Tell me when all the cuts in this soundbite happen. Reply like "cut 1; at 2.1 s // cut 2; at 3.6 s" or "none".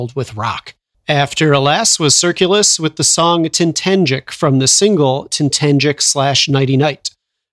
cut 1; at 0.9 s